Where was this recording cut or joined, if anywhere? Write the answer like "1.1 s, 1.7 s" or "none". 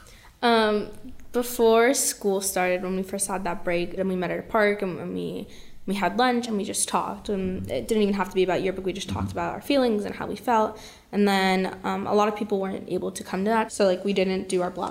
4.0 s, 13.7 s